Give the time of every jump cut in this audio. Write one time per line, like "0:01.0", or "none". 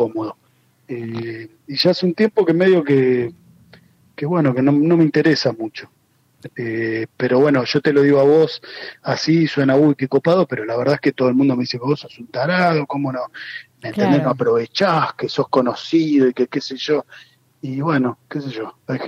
0:06.5